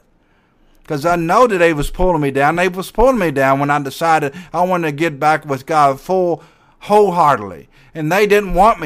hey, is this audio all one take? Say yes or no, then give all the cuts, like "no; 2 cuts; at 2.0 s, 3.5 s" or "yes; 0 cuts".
yes; 0 cuts